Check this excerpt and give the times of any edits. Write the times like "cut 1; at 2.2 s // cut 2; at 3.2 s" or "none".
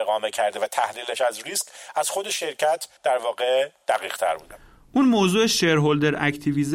cut 1; at 3.0 s